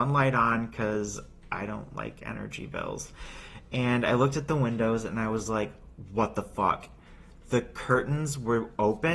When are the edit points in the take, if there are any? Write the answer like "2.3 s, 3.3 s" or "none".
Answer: none